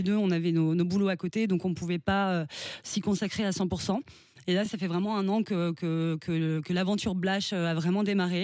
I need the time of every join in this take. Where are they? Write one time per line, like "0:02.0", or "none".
none